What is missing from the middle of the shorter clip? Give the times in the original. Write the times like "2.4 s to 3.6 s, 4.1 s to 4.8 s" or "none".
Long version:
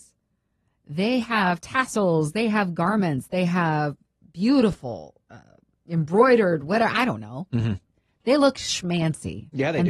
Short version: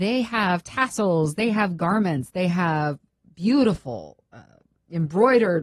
none

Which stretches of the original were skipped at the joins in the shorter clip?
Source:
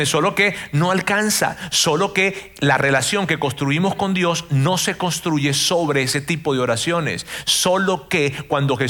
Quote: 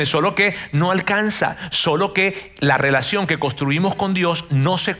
none

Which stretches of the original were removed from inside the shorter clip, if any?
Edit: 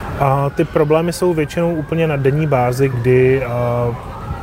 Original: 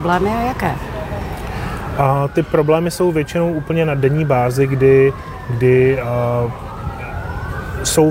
4.7 s to 5.5 s

